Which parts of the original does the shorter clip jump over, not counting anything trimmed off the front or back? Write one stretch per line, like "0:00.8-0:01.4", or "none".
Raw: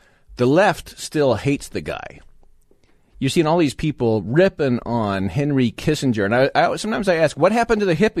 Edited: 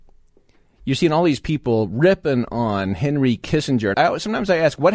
0:06.3-0:06.5